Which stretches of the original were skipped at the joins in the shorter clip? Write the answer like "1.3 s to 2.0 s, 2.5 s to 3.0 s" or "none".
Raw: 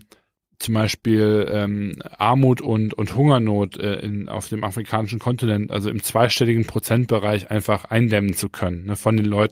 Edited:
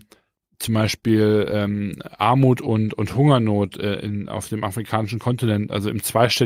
none